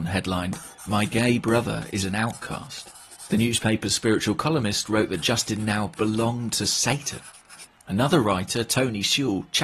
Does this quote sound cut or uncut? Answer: uncut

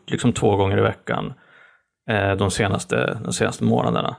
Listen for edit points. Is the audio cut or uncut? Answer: uncut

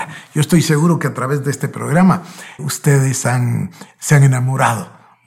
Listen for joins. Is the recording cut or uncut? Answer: cut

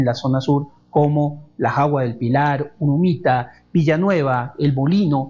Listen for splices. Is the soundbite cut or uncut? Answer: uncut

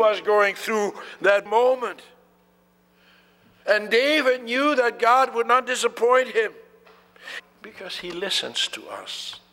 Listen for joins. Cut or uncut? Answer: cut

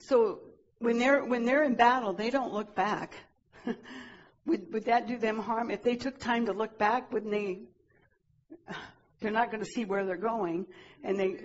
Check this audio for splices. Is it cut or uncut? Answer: uncut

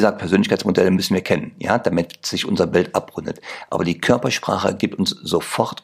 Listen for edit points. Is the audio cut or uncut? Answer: uncut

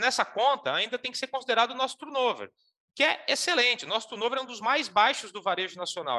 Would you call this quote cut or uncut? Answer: uncut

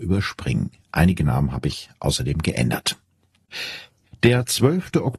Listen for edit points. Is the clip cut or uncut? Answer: uncut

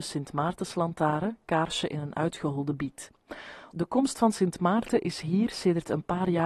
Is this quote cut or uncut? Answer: cut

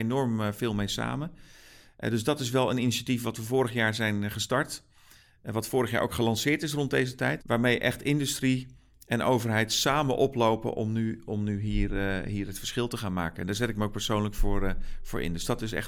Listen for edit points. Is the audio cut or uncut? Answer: cut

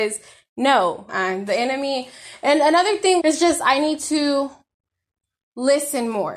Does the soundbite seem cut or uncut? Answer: cut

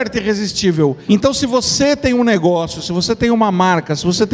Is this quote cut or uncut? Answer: cut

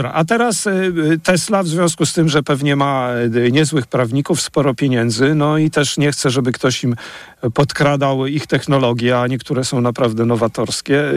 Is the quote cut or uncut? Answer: uncut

